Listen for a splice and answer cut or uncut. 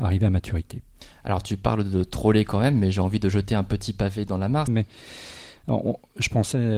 cut